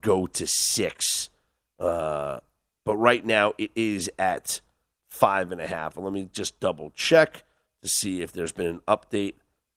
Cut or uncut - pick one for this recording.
uncut